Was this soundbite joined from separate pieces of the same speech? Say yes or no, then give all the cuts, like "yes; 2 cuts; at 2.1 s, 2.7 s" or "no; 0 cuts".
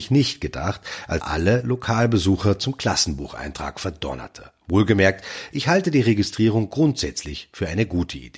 yes; 1 cut; at 1.2 s